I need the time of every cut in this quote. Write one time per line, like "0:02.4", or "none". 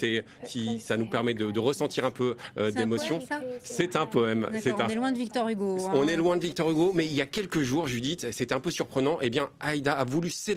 none